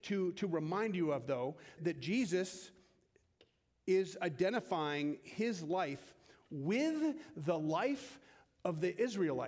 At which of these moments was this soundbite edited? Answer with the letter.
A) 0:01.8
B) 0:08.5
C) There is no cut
A